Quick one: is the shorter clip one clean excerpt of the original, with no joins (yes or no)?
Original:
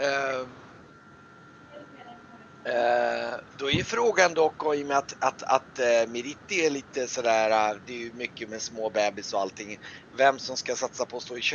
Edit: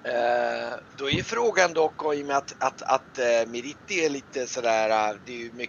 yes